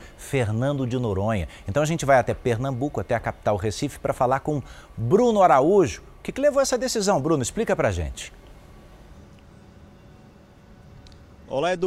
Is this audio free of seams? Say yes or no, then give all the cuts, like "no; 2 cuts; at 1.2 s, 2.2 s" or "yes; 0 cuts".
yes; 0 cuts